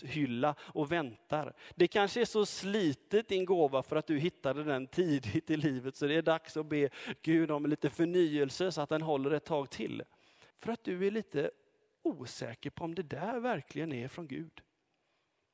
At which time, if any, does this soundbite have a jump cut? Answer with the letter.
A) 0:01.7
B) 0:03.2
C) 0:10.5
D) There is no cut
C